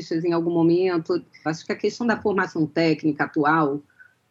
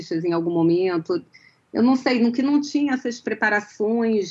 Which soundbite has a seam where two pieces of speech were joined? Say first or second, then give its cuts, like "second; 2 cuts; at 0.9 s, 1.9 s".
first; 1 cut; at 1.5 s